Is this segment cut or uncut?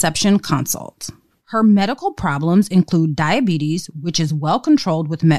cut